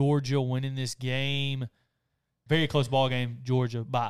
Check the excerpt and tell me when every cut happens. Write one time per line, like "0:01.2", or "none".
0:02.5